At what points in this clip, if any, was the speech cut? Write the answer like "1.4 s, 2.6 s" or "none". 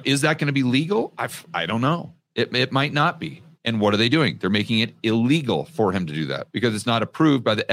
3.6 s, 6.5 s

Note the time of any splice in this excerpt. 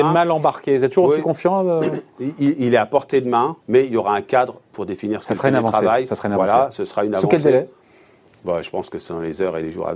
3.6 s

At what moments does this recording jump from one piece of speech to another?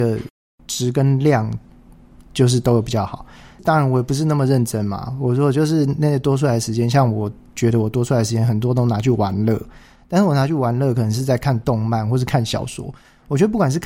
none

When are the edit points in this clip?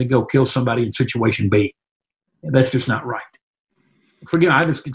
none

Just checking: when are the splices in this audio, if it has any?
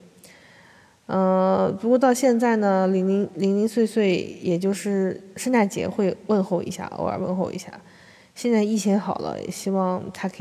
none

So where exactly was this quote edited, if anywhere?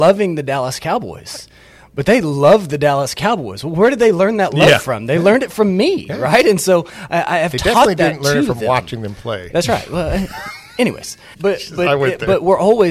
11.3 s

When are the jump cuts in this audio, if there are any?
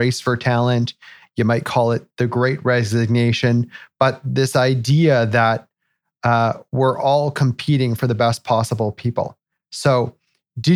none

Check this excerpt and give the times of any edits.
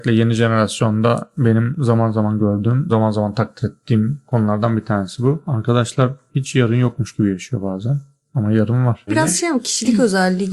2.9 s, 9.1 s

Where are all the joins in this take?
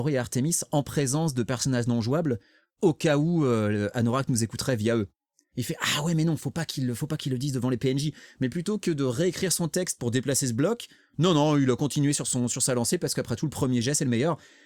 5.5 s

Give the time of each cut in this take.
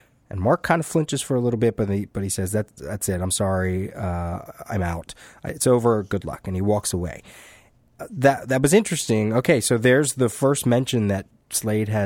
none

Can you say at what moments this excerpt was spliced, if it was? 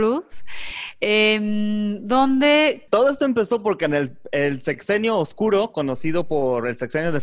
2.9 s

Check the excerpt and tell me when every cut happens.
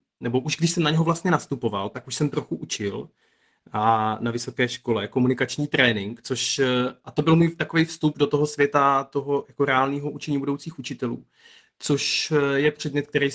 none

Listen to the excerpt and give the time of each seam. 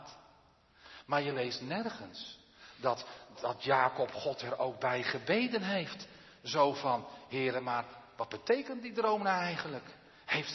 3.3 s

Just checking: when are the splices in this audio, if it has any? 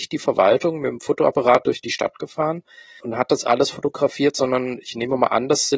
3.0 s

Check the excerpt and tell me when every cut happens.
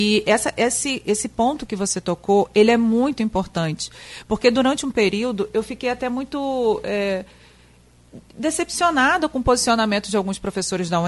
8.3 s

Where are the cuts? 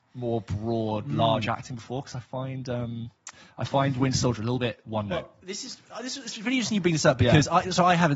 none

